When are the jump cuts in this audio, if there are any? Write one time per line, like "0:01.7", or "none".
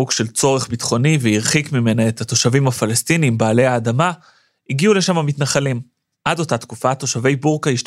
0:06.1